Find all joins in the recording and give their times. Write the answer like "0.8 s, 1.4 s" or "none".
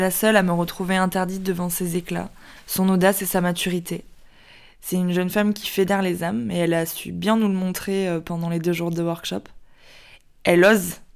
none